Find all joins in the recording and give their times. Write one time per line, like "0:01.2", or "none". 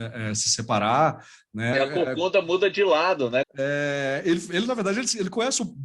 0:01.7
0:03.4